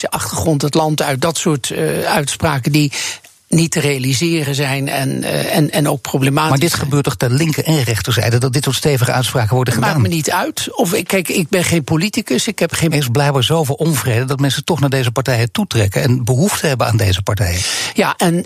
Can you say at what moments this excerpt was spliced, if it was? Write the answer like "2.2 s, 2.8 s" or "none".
12.9 s